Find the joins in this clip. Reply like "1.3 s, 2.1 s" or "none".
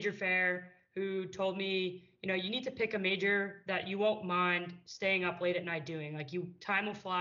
none

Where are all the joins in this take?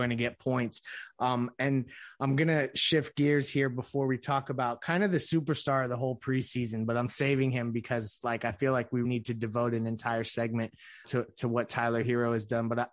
9.0 s, 11.0 s

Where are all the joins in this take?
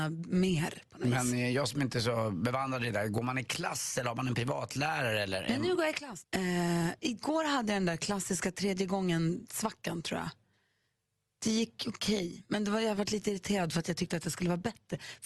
6.2 s

